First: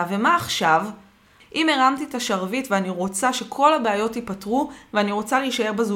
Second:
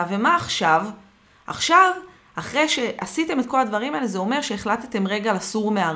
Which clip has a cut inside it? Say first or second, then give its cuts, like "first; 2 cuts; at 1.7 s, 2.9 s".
first; 1 cut; at 1.4 s